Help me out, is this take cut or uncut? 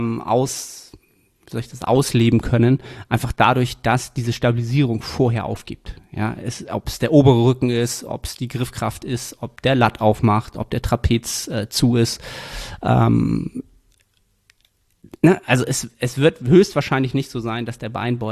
uncut